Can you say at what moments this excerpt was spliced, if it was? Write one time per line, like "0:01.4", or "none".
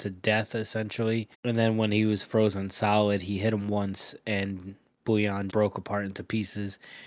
0:01.3
0:05.5